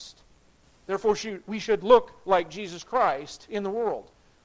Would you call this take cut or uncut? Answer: uncut